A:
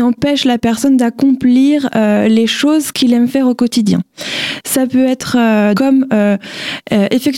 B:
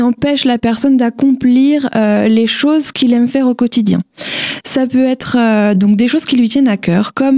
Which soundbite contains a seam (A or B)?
A